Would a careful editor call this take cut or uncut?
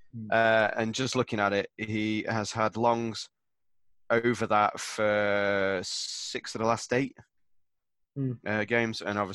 uncut